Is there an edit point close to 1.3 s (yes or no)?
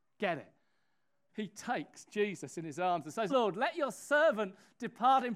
yes